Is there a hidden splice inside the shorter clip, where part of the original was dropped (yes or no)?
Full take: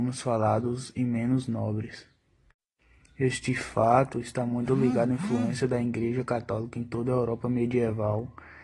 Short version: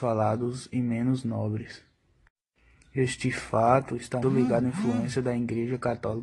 yes